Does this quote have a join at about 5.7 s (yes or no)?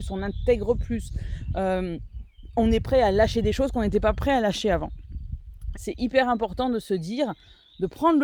yes